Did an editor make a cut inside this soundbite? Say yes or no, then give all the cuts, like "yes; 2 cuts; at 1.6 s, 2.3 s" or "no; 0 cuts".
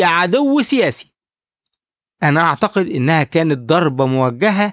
no; 0 cuts